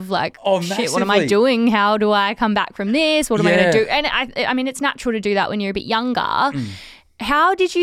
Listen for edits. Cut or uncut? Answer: uncut